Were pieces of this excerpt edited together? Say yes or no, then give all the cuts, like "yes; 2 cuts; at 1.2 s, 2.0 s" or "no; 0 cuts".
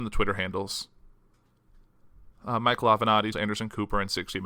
yes; 1 cut; at 3.3 s